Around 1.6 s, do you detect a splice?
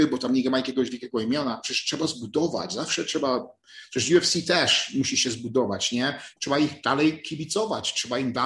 no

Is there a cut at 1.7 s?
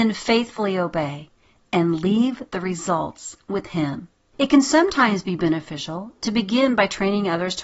no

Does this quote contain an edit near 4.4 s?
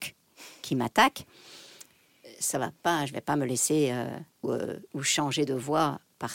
yes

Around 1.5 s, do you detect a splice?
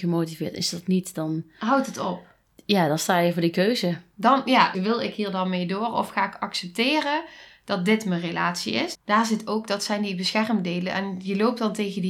no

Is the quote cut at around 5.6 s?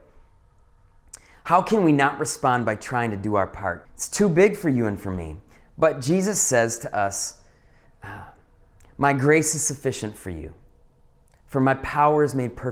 no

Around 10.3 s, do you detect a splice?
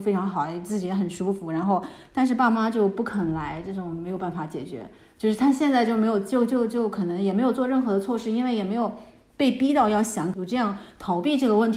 yes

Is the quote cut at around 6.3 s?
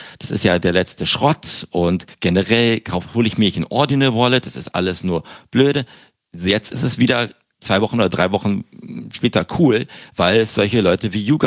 no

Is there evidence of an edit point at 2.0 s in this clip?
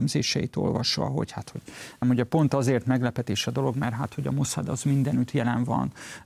yes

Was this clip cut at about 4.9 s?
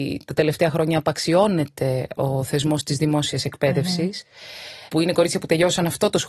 yes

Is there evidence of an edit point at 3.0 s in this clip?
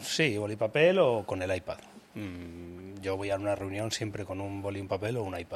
no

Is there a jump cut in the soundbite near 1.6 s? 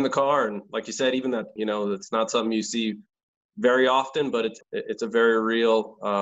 yes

